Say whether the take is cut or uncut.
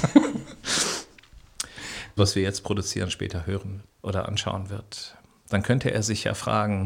cut